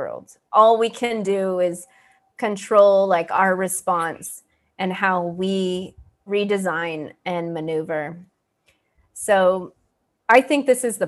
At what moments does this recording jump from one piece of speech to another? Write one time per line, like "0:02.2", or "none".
0:06.3